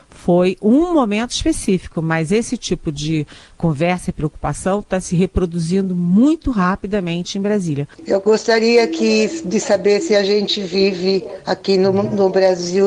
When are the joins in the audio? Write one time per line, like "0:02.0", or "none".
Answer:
0:07.9